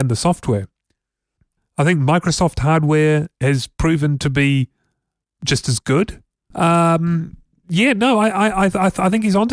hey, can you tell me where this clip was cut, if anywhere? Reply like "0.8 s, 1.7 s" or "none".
1.6 s, 6.5 s